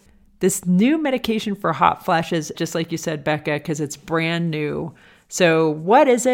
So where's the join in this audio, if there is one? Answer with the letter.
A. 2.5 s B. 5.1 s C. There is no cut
A